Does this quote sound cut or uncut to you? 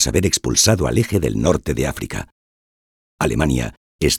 uncut